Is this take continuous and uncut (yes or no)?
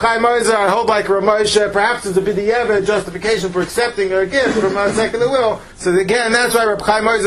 no